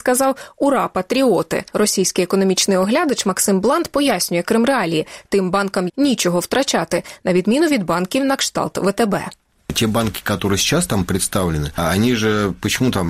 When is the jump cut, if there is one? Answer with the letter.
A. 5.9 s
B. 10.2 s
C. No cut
A